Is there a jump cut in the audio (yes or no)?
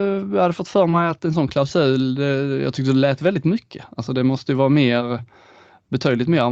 no